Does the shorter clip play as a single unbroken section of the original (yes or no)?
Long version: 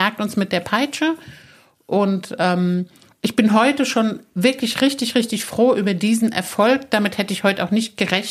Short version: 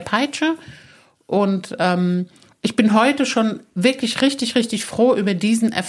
yes